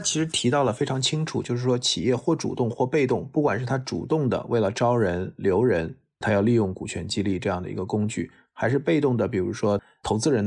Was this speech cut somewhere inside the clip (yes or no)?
no